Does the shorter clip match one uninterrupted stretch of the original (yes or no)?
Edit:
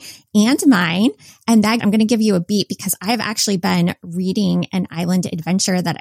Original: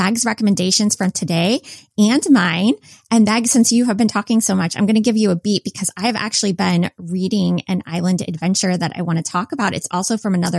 no